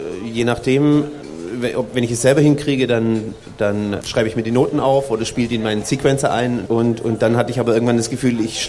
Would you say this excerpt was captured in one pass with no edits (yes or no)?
no